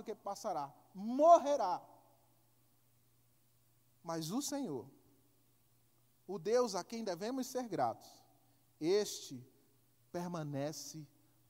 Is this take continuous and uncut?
yes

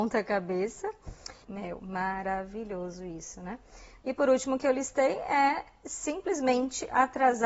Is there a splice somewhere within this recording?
yes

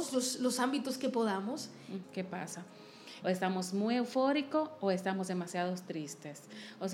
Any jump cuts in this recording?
yes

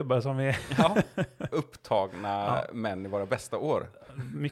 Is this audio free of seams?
yes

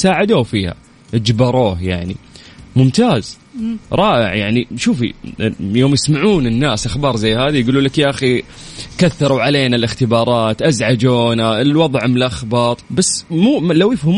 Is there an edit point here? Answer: yes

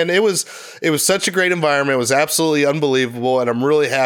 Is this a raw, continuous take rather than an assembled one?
yes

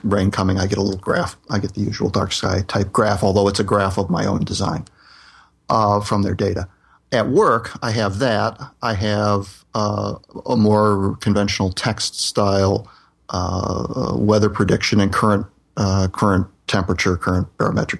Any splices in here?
no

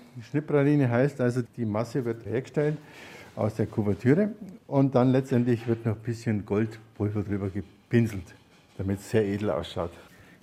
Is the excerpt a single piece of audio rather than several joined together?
no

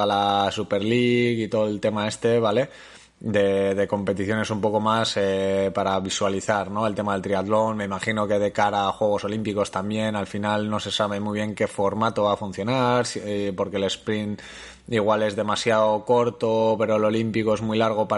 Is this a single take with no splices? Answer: yes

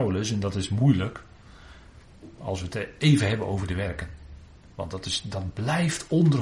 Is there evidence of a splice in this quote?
yes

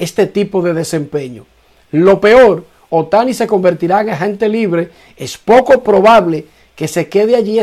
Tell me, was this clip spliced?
no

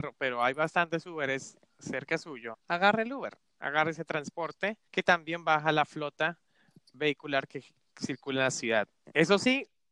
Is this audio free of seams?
no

